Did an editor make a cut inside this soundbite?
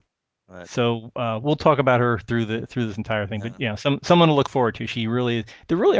no; 0 cuts

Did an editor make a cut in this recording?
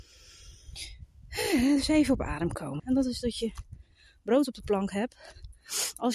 yes; 1 cut; at 2.8 s

